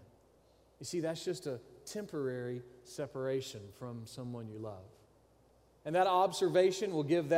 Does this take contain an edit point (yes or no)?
yes